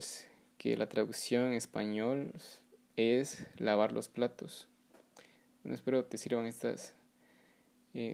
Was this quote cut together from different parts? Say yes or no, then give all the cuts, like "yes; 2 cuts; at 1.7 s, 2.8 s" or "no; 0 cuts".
no; 0 cuts